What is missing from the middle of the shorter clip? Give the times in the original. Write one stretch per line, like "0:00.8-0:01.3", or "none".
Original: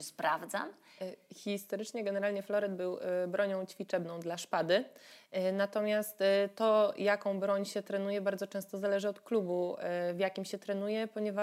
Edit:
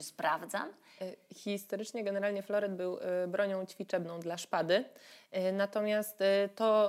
none